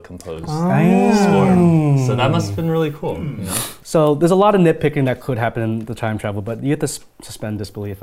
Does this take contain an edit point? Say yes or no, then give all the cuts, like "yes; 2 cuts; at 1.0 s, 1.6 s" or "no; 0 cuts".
no; 0 cuts